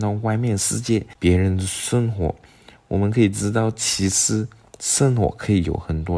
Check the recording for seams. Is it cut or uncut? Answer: uncut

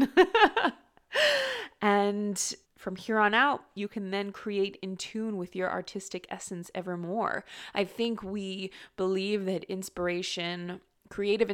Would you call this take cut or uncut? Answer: cut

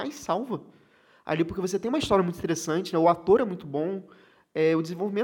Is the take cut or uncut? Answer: uncut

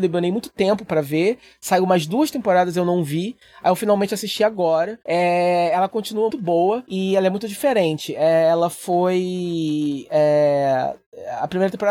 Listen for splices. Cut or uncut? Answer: cut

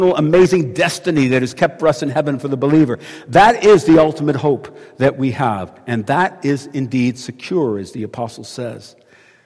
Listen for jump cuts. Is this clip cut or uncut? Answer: uncut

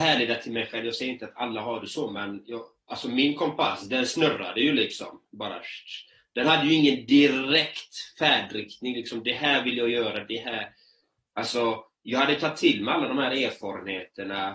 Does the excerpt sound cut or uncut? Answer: uncut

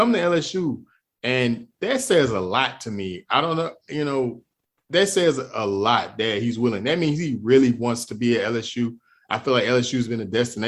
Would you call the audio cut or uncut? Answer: uncut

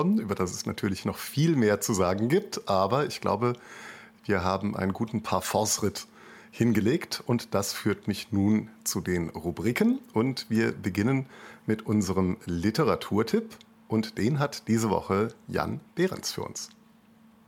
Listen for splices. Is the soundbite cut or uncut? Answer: uncut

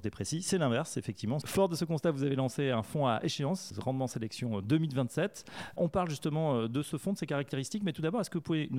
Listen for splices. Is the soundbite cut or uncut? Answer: cut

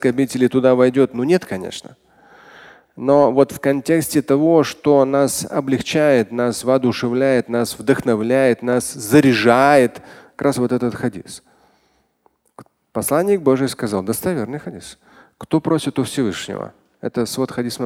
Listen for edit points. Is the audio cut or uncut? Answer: uncut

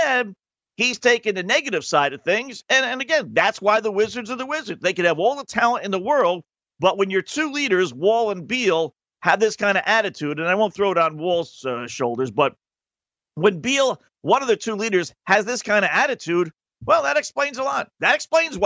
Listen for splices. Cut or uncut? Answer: uncut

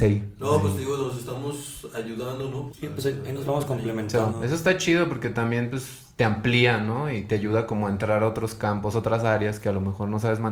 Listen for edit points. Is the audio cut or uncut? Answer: cut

